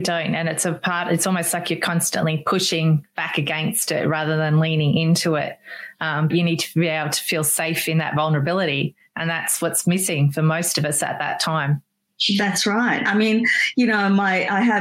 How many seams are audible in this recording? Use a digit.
1